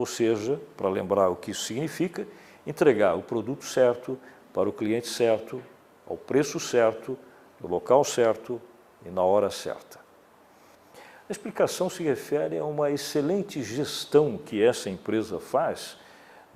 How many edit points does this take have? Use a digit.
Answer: 1